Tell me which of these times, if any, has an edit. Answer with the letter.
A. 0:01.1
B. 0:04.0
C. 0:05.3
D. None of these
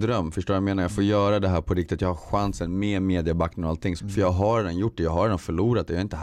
B